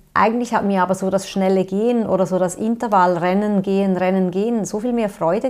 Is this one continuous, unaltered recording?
yes; 0 cuts

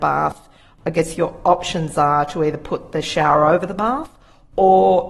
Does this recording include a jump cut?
no; 0 cuts

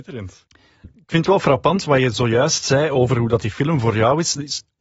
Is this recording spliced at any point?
yes; 1 cut; at 1.8 s

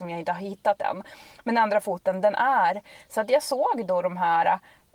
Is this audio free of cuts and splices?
yes; 0 cuts

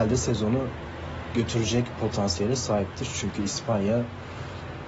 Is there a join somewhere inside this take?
no; 0 cuts

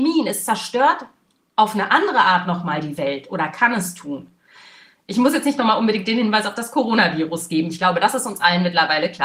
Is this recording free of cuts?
yes; 0 cuts

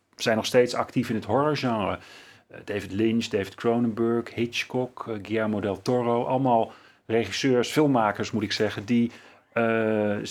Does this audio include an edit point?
no; 0 cuts

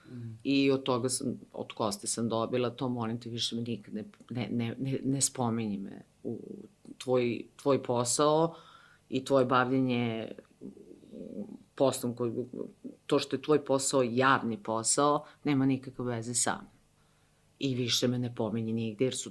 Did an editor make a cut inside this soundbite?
no; 0 cuts

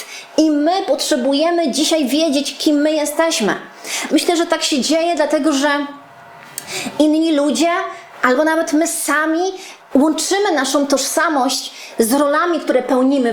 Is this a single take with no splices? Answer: no; 2 cuts; at 4.1 s, 9.9 s

